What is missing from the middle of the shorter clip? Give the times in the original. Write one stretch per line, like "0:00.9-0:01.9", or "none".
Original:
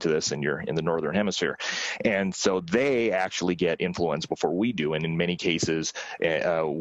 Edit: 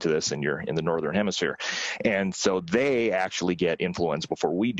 none

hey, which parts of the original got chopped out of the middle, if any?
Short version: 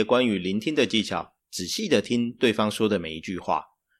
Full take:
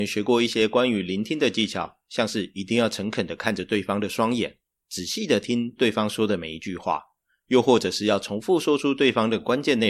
0:02.0-0:04.8

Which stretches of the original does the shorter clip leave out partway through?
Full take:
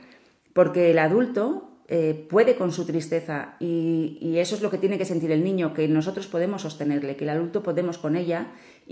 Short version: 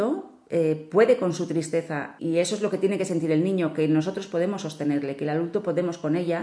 0:03.6-0:04.2

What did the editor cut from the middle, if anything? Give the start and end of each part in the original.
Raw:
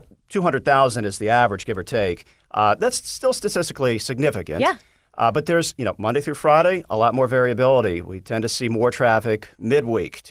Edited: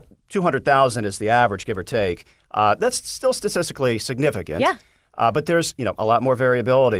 0:06.0-0:06.9

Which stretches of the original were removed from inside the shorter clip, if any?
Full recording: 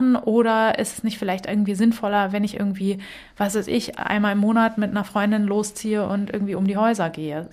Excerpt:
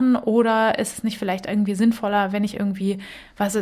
none

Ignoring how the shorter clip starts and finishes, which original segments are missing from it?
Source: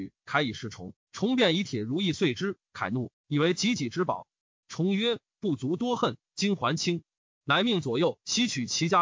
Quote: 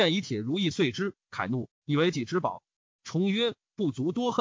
0:03.5-0:03.8

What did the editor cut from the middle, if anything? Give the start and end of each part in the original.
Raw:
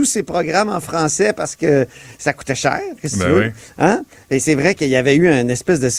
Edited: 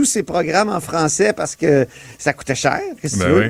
none

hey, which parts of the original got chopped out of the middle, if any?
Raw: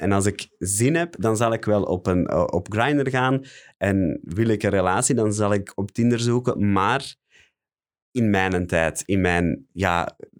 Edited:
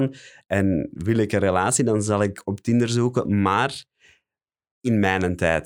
none

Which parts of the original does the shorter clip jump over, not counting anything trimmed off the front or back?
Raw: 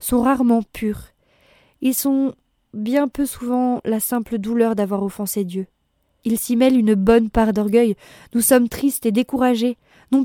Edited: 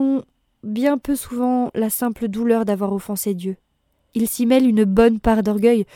none

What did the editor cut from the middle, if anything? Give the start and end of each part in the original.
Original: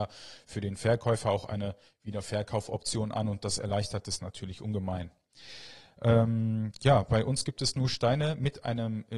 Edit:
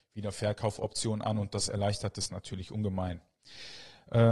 none

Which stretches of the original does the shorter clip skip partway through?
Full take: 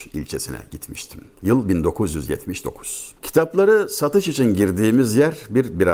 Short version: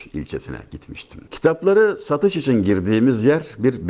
0:01.3-0:03.2

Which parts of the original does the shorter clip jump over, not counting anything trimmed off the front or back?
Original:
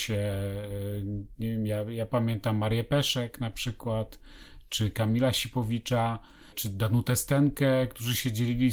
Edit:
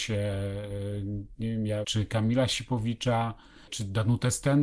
0:01.8-0:04.7

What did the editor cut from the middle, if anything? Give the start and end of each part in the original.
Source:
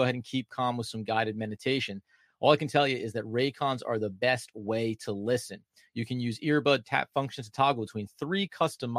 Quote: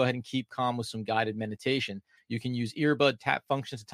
0:02.2-0:05.8

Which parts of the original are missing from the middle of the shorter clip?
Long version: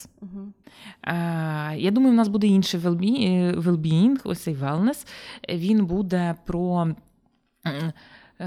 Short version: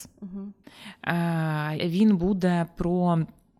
0:01.8-0:05.5

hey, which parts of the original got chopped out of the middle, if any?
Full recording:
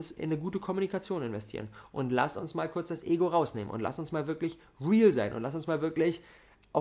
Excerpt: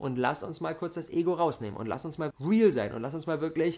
0:04.2-0:04.7

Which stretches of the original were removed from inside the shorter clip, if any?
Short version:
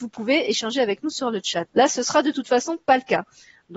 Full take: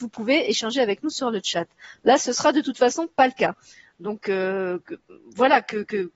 0:01.7-0:02.0

